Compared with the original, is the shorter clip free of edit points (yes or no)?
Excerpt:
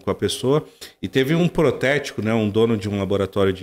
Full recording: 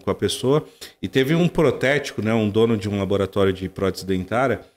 yes